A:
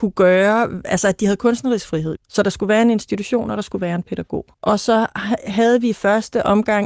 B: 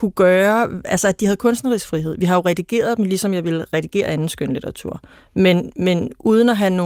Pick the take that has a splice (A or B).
A